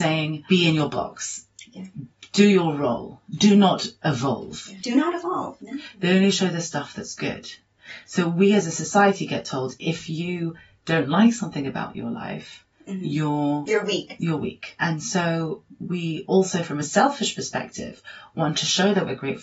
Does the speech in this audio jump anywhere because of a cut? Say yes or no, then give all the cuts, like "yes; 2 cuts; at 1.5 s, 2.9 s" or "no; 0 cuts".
yes; 1 cut; at 5.6 s